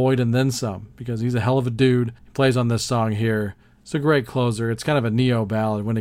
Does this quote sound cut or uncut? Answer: cut